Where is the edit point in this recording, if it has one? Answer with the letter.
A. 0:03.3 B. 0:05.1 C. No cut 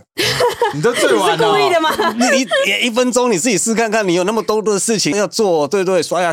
B